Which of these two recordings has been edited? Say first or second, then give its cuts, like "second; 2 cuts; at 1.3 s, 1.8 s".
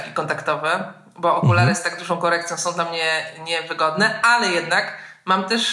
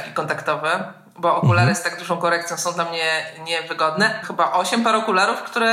second; 1 cut; at 4.2 s